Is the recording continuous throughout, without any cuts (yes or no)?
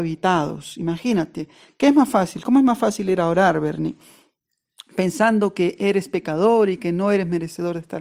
yes